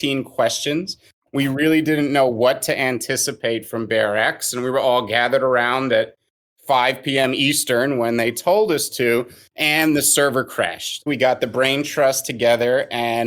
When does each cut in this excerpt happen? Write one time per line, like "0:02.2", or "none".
0:11.1